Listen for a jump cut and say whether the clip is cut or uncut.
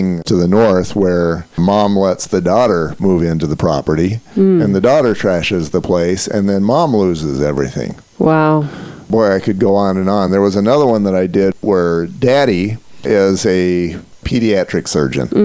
uncut